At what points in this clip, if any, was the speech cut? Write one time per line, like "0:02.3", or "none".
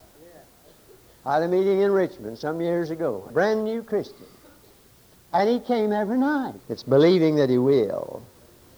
0:03.3
0:06.6

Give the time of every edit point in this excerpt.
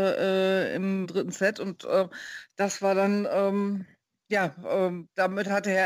0:01.0

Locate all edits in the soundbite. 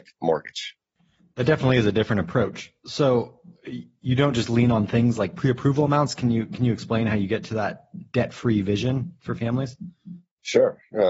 none

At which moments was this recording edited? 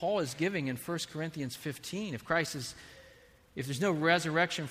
none

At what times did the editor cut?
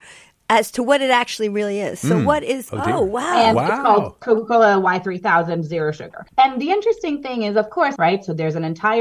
0:02.7
0:06.3
0:08.0

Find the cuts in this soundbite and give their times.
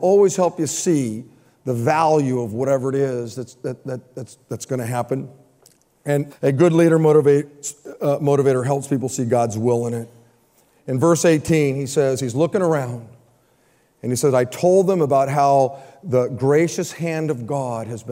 0:06.3

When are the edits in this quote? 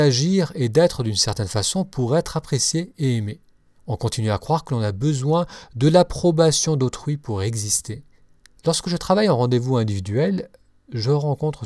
0:03.8
0:08.6

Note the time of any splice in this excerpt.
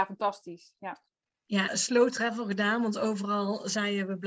0:01.7

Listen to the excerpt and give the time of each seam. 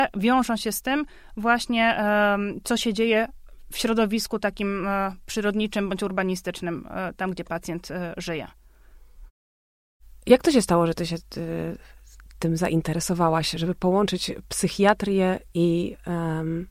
none

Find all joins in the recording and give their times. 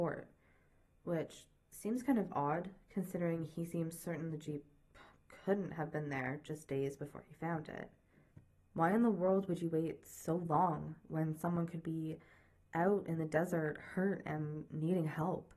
0:08.6

